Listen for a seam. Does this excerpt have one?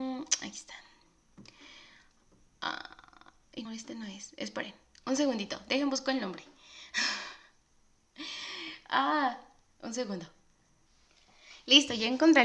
yes; 1 cut; at 3.7 s

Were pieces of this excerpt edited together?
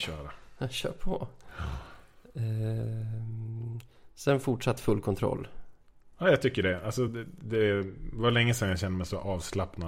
no; 0 cuts

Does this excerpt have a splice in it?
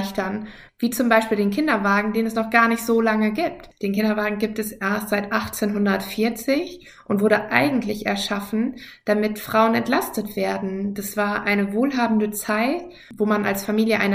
no; 0 cuts

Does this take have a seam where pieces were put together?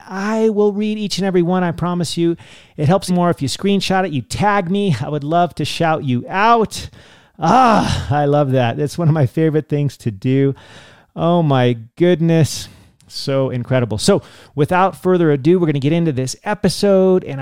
yes; 1 cut; at 3.1 s

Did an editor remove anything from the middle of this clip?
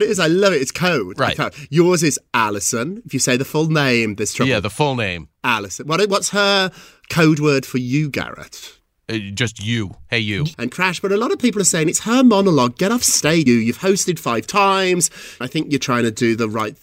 yes; 3 cuts; at 10.5 s, 13.5 s, 15.4 s

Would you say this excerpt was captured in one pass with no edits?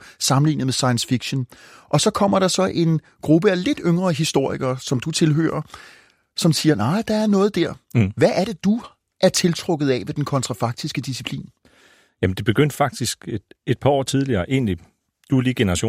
yes; 0 cuts

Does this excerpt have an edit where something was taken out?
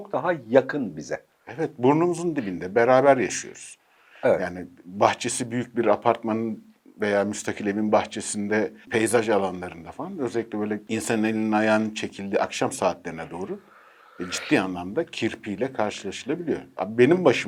yes; 1 cut; at 8.8 s

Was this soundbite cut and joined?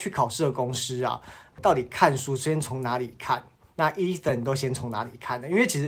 yes; 1 cut; at 1.5 s

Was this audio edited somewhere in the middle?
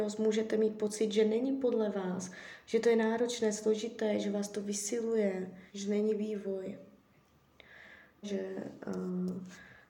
yes; 2 cuts; at 5.7 s, 8.2 s

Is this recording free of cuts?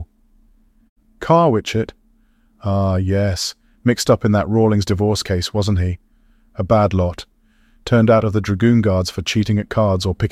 yes; 0 cuts

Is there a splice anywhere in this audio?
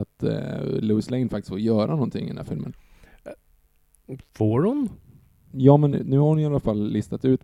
no; 0 cuts

